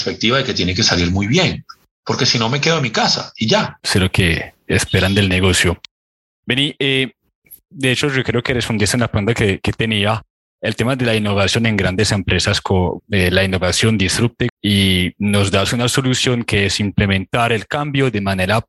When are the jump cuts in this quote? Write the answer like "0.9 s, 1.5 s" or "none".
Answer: 13.0 s, 14.5 s